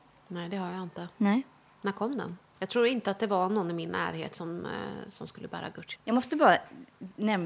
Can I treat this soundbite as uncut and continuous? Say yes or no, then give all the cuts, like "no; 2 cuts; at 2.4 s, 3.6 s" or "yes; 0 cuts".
no; 2 cuts; at 2.5 s, 5.9 s